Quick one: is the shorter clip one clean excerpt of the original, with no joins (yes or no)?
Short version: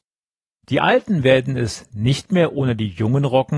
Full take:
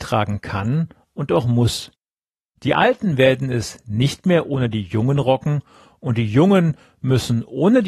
yes